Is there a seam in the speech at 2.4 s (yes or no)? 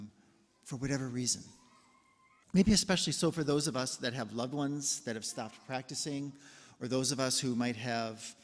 yes